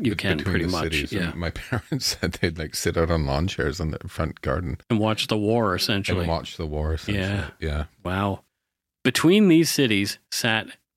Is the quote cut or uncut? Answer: uncut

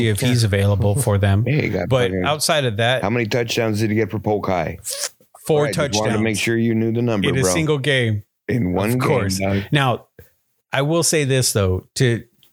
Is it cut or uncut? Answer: uncut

